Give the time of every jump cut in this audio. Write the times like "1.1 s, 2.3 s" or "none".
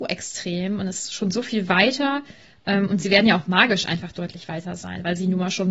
none